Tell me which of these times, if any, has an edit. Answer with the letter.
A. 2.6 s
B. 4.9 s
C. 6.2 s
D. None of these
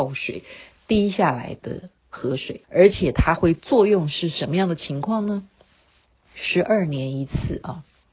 A